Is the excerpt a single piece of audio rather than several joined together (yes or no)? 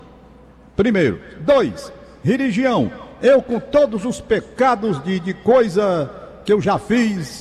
yes